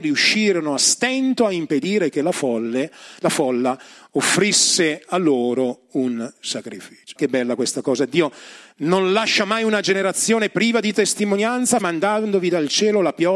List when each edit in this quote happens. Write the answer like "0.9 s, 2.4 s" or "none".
7.2 s, 11.8 s

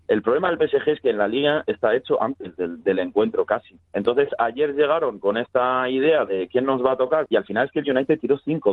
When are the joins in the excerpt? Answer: 3.9 s, 7.3 s

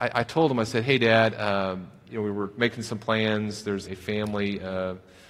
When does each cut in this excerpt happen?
3.9 s

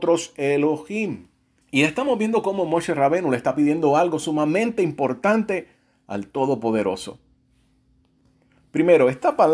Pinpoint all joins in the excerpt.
1.6 s

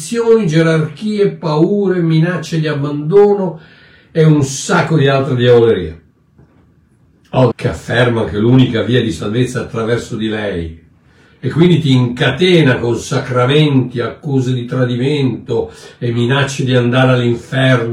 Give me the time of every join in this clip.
7.5 s

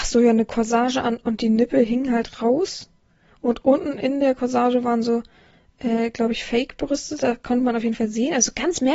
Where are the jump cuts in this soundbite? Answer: none

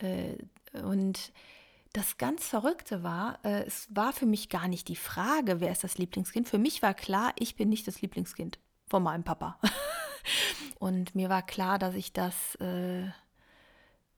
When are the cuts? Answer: 10.7 s

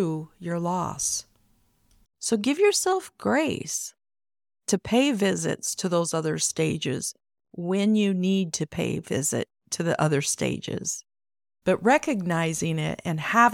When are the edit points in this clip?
2.0 s, 11.6 s

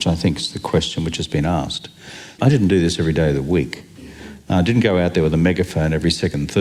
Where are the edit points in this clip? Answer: 2.4 s

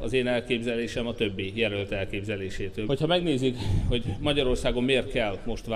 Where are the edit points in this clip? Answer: 2.9 s

